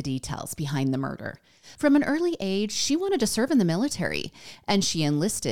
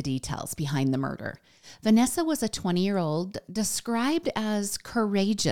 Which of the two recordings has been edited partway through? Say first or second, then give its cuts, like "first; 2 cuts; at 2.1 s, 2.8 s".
first; 1 cut; at 1.7 s